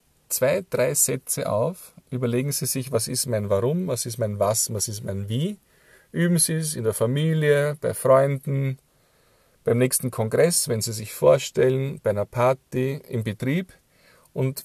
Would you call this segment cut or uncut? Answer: uncut